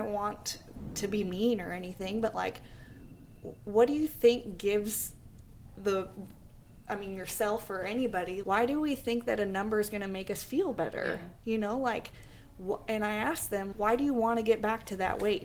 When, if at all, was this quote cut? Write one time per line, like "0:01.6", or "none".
0:08.4
0:13.7